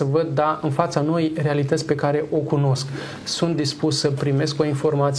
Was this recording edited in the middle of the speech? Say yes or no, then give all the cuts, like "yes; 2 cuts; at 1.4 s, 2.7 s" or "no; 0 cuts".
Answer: no; 0 cuts